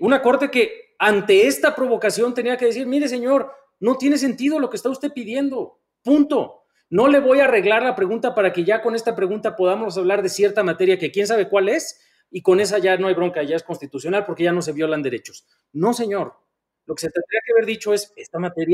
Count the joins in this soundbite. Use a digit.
0